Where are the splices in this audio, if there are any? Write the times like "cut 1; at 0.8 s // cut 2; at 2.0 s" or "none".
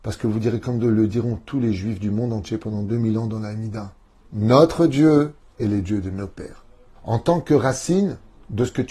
cut 1; at 4.2 s // cut 2; at 7.0 s